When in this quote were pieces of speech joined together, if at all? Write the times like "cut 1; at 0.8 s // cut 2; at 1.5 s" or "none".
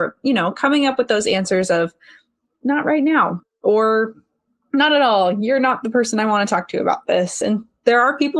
none